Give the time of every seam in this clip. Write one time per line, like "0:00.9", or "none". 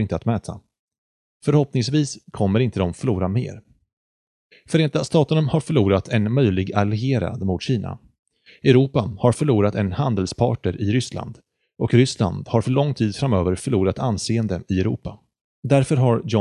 0:15.5

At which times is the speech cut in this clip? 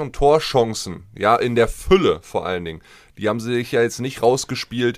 none

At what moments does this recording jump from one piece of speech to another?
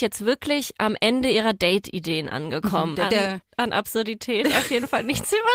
0:02.9

